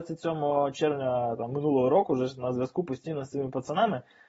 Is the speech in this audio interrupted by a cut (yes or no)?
no